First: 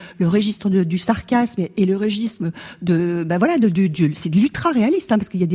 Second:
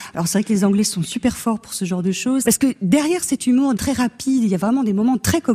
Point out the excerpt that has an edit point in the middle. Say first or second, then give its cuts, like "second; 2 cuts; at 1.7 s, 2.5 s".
second; 2 cuts; at 2.4 s, 3.8 s